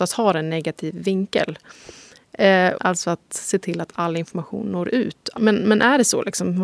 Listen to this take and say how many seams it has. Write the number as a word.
two